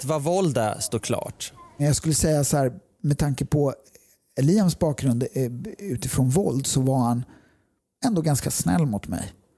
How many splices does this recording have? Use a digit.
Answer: 1